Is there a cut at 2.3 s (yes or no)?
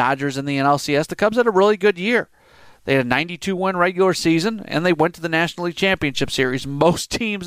no